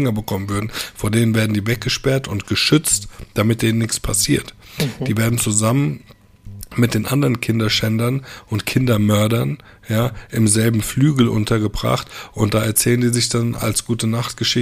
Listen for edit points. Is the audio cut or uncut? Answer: uncut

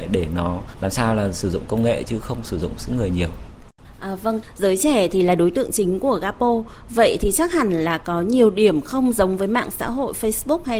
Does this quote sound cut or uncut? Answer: uncut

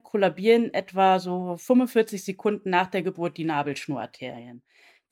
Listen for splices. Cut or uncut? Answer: uncut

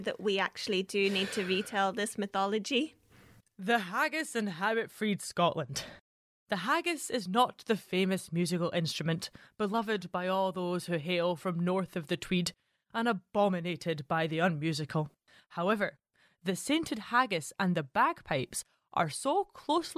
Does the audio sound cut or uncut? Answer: uncut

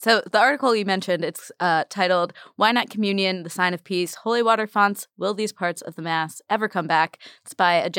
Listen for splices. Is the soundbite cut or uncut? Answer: uncut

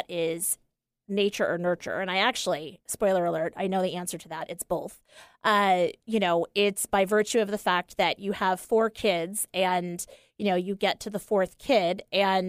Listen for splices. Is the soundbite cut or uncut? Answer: uncut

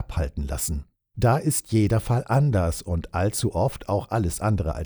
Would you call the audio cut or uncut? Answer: cut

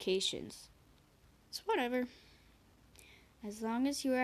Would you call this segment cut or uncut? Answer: cut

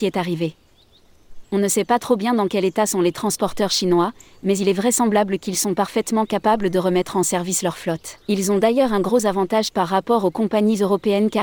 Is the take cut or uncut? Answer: cut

